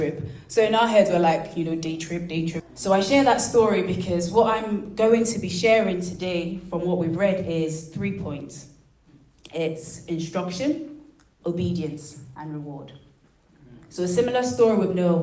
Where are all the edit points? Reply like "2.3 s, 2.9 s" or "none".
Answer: 2.6 s